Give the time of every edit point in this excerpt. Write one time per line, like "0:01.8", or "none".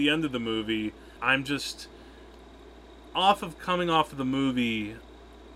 0:01.2